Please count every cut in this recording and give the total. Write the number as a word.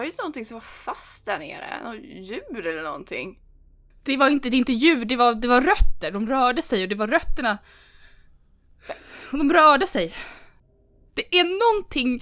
one